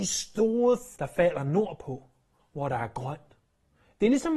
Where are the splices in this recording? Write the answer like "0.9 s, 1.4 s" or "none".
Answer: 1.0 s